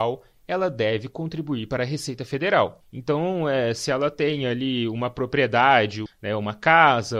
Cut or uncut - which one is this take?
cut